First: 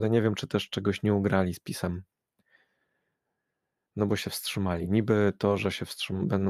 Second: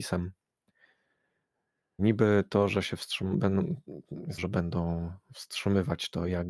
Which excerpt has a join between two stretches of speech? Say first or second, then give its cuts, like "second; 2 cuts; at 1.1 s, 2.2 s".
second; 2 cuts; at 2.0 s, 4.4 s